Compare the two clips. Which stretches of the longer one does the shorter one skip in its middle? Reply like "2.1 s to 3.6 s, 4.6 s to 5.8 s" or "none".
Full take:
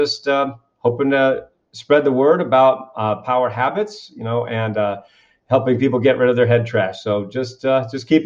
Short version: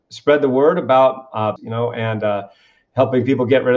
3.2 s to 4.1 s